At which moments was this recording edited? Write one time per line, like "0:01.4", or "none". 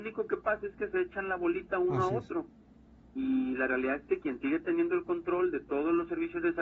none